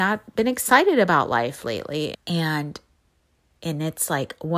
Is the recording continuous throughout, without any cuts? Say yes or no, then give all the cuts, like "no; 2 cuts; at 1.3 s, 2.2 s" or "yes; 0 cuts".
no; 1 cut; at 2.1 s